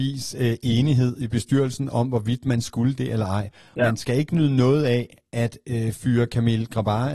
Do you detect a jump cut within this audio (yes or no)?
yes